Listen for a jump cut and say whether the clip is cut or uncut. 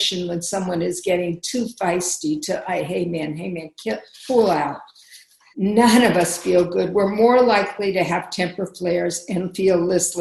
cut